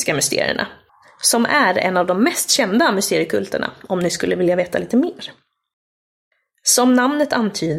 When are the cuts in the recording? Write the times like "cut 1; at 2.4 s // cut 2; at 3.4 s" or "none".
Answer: none